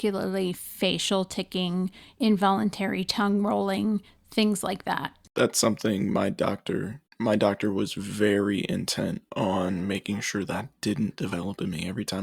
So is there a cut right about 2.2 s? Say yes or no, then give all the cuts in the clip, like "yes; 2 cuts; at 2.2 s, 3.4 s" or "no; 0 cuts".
no; 0 cuts